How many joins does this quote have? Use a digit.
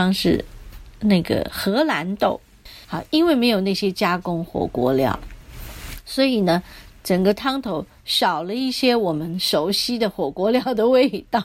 1